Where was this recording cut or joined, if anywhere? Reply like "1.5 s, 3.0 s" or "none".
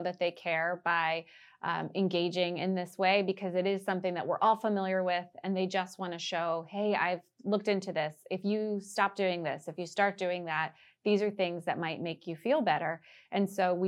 none